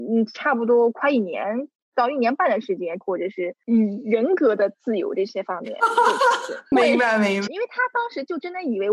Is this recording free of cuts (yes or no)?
no